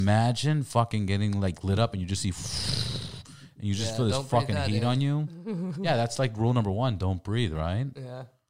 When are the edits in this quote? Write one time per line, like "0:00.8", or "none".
none

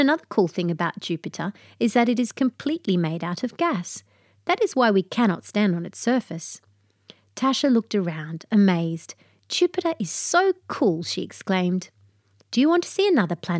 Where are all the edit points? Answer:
none

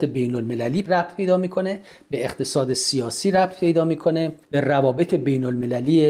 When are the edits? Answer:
0:04.4

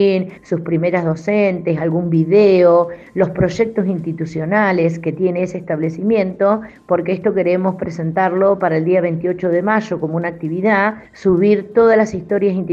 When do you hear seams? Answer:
none

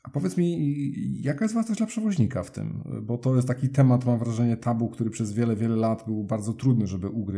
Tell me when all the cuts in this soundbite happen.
none

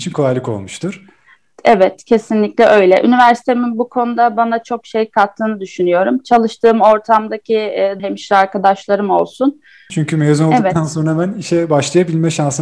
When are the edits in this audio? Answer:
0:08.0
0:09.9

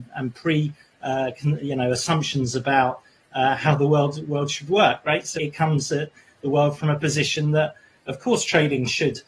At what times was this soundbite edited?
0:05.4

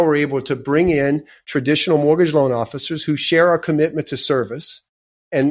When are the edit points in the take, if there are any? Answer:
none

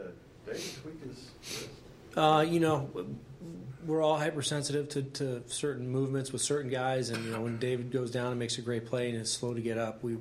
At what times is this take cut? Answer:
none

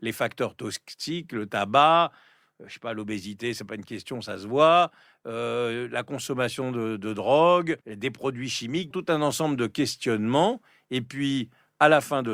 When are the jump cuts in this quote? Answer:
0:07.8
0:08.9

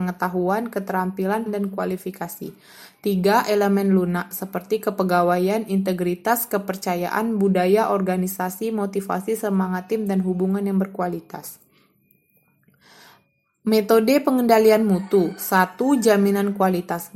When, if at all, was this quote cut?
0:01.5

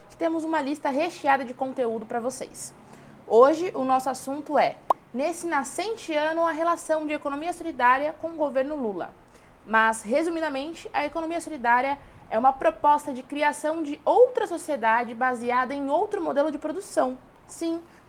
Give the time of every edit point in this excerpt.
none

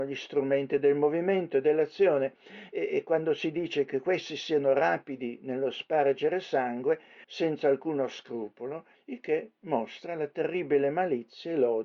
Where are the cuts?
0:07.2
0:08.9

